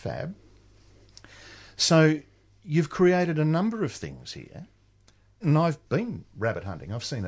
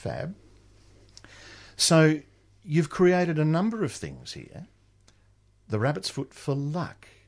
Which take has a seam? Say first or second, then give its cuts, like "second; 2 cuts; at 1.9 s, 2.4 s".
first; 1 cut; at 5.4 s